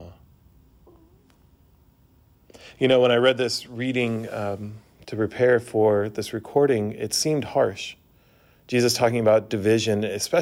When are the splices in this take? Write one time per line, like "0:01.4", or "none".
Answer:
none

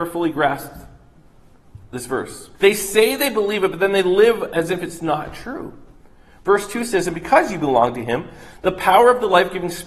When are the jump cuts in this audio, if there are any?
0:02.5

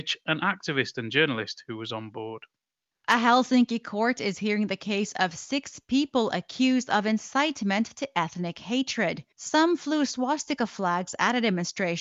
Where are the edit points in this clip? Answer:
0:09.3

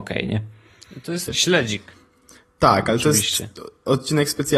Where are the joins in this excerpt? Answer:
0:01.3

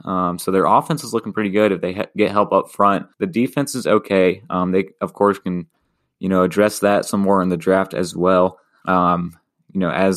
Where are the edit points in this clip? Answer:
0:03.1
0:08.8

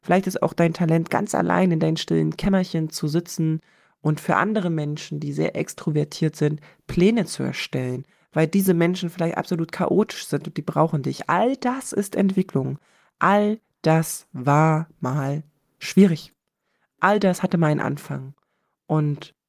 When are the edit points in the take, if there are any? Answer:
none

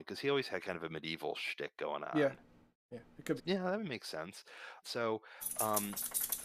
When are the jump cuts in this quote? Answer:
0:03.4
0:04.8

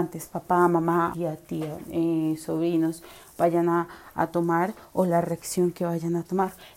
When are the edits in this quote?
0:01.1

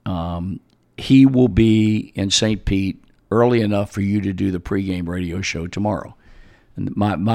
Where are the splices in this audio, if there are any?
none

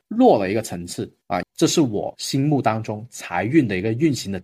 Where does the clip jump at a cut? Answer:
0:01.4

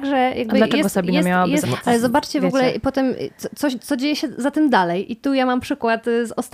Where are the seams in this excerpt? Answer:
0:01.6

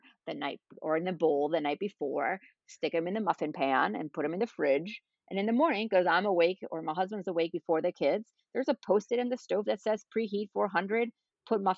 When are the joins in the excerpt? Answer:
none

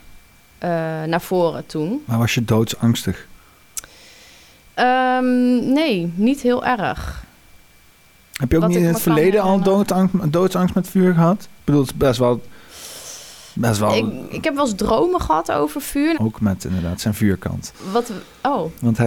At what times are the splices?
0:16.1

